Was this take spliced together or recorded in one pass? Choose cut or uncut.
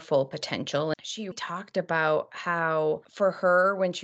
uncut